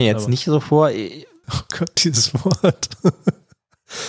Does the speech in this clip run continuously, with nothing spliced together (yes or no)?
no